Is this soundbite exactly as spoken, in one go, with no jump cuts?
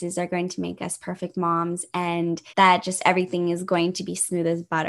no; 1 cut; at 2.5 s

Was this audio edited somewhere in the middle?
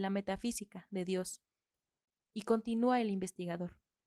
no; 0 cuts

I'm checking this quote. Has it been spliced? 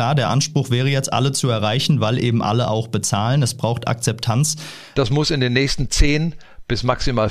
yes; 1 cut; at 4.9 s

